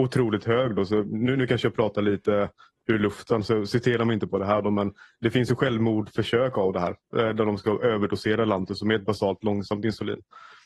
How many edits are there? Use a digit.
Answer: 0